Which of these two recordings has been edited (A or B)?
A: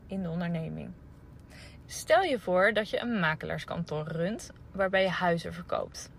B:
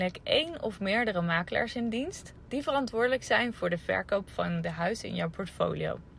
A